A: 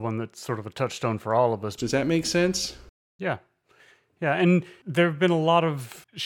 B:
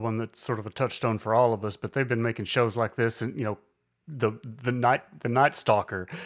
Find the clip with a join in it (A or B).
A